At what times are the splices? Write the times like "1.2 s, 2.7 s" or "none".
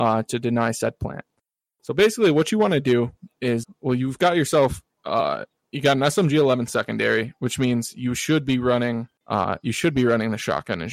3.6 s, 9.2 s